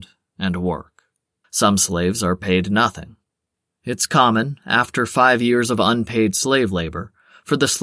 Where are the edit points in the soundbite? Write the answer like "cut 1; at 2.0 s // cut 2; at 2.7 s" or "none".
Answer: cut 1; at 1.4 s